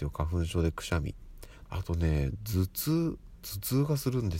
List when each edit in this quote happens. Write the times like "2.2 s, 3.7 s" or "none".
1.7 s